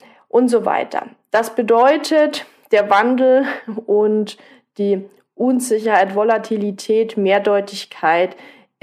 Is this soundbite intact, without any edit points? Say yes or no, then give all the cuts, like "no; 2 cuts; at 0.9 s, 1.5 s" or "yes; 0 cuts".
yes; 0 cuts